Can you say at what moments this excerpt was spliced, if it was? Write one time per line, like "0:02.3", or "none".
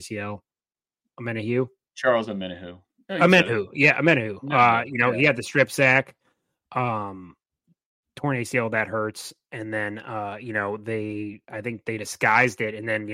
none